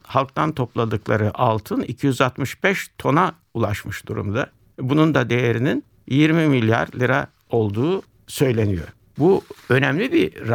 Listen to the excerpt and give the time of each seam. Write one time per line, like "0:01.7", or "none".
none